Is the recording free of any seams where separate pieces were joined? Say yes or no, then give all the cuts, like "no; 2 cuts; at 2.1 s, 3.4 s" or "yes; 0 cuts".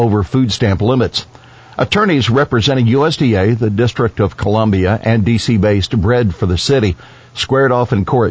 yes; 0 cuts